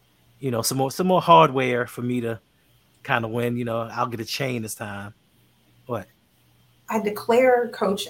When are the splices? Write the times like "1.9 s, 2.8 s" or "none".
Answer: none